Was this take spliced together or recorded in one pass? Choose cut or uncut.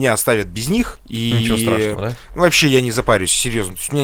uncut